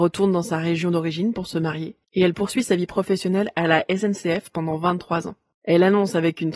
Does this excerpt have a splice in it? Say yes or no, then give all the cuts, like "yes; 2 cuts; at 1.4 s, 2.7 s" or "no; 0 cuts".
no; 0 cuts